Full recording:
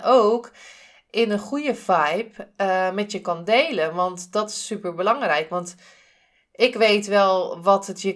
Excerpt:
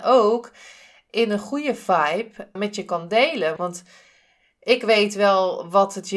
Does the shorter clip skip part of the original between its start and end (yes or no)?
yes